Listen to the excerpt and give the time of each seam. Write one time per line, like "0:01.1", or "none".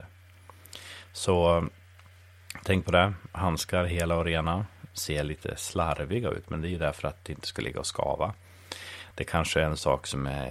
0:04.9